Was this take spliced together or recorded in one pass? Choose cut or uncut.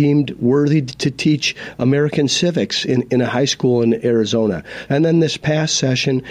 cut